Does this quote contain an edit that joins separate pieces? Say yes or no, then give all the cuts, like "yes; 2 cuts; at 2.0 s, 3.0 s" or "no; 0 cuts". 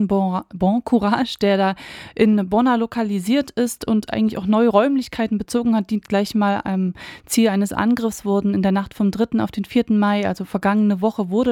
no; 0 cuts